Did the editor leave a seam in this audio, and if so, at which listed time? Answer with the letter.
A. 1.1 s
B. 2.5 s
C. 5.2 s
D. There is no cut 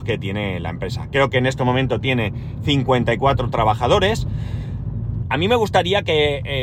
C